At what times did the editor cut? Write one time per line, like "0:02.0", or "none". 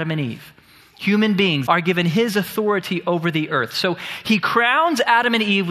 0:01.7